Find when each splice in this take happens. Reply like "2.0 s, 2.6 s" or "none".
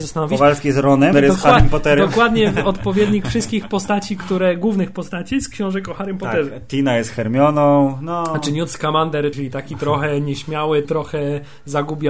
1.1 s, 9.3 s, 10.8 s